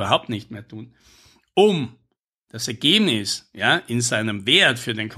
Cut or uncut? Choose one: uncut